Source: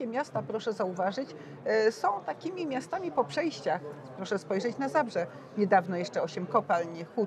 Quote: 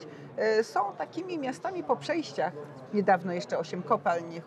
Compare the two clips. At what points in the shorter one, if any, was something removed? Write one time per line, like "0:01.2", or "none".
0:02.9